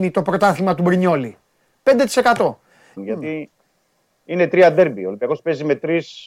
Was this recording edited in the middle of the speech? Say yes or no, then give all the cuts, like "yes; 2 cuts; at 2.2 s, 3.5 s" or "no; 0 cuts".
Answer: yes; 1 cut; at 3.0 s